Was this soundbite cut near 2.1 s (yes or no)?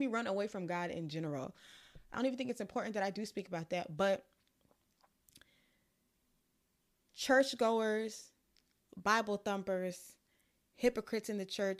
yes